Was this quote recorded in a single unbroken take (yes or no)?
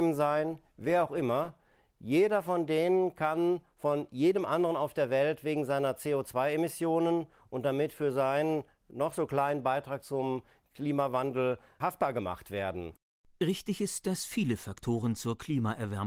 yes